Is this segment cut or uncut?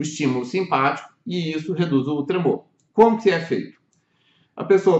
uncut